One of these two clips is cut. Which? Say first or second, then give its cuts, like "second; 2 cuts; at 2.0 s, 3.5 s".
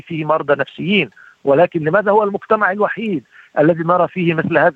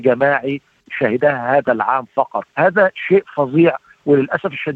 second; 1 cut; at 2.5 s